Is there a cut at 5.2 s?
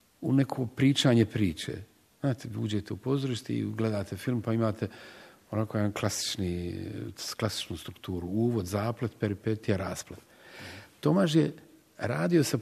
no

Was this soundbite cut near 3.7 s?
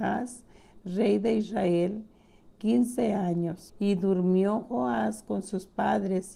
yes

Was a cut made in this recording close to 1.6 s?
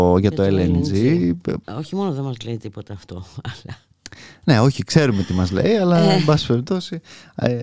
yes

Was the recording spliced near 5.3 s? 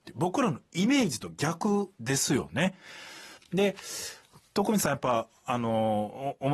no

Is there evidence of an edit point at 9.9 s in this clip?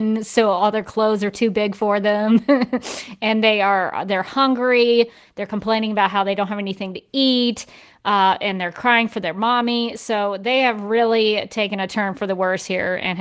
no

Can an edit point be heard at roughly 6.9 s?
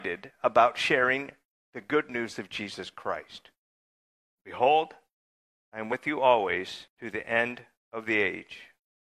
yes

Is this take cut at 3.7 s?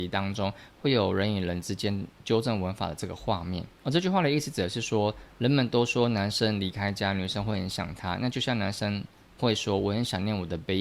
yes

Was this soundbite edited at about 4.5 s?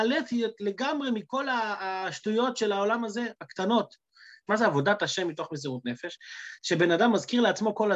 yes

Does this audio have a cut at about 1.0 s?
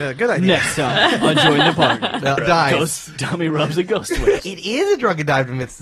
no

